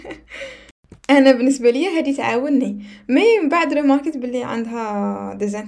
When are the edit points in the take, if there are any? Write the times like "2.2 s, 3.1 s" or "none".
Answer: 1.0 s